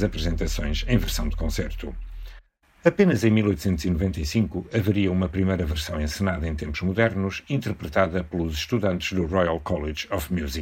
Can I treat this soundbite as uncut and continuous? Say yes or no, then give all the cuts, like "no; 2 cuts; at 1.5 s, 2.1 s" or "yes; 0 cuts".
yes; 0 cuts